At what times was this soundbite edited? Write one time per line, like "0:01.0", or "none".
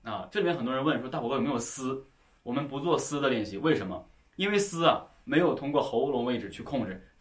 none